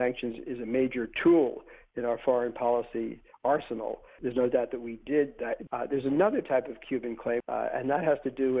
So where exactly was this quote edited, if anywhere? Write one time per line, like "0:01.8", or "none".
0:04.2
0:05.7
0:07.4

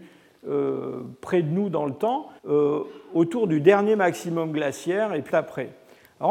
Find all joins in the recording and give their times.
0:02.4
0:05.3

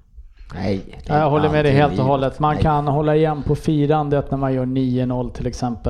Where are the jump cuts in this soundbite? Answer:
none

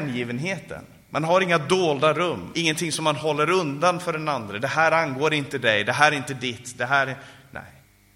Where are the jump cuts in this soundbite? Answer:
0:02.5

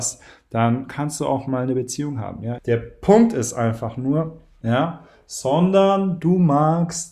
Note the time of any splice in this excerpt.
0:02.6
0:04.6

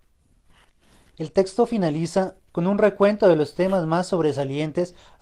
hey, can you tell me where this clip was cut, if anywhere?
0:02.5

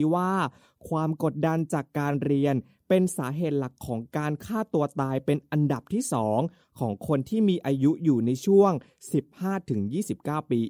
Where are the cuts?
none

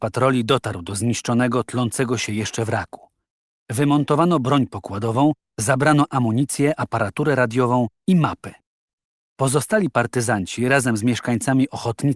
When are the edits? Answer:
none

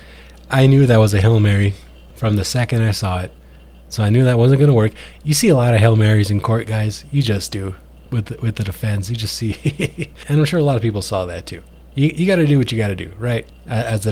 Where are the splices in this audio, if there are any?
0:10.2

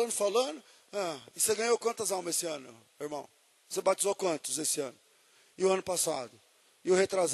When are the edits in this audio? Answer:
none

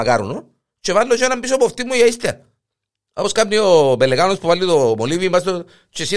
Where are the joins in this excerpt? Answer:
none

